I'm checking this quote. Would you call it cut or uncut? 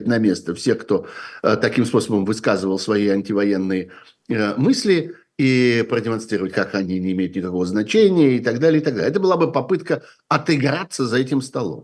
cut